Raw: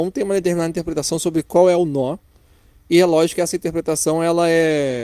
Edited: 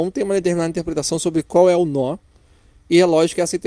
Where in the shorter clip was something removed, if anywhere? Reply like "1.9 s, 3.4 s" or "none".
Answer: none